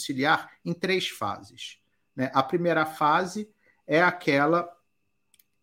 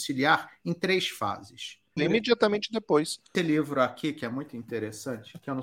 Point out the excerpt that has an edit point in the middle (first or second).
second